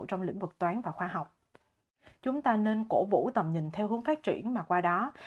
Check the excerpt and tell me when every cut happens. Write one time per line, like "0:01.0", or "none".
0:02.2